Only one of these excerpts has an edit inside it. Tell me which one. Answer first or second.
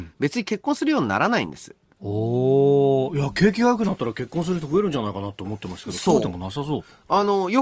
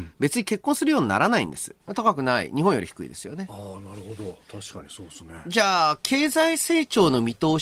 second